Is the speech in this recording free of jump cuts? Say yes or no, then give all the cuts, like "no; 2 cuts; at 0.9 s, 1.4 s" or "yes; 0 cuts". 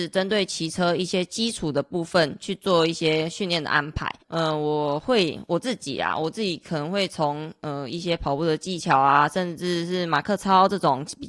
no; 1 cut; at 4.2 s